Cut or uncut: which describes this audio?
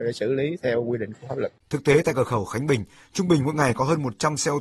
cut